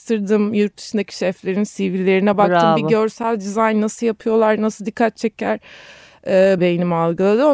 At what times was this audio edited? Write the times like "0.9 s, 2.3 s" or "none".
6.6 s